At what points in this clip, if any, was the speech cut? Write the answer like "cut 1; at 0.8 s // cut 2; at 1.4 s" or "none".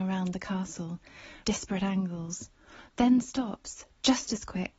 cut 1; at 1.4 s // cut 2; at 2.9 s